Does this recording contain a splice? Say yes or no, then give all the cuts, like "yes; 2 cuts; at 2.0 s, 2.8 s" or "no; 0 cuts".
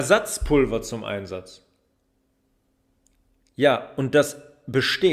no; 0 cuts